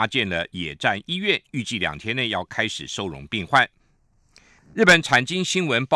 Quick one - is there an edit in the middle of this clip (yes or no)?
yes